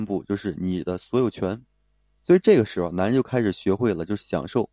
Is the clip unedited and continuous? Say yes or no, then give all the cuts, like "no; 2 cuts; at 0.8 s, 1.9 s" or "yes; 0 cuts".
yes; 0 cuts